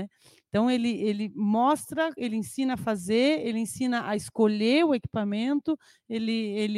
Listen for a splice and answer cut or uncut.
uncut